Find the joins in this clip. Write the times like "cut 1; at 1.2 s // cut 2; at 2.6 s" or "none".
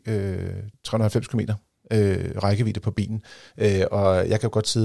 cut 1; at 3.5 s